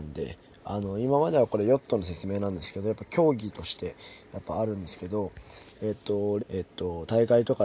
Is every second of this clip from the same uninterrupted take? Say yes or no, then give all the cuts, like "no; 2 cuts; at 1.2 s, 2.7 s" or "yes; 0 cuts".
no; 1 cut; at 6.4 s